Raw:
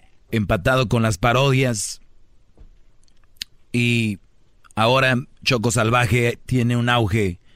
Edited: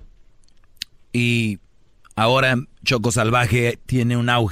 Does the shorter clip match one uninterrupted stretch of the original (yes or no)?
yes